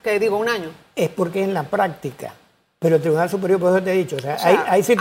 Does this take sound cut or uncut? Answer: uncut